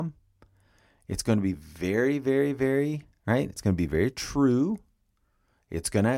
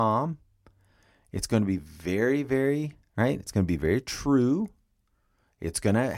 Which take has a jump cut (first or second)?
second